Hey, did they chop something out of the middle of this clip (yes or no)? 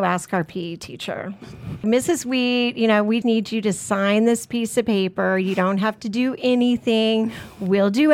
yes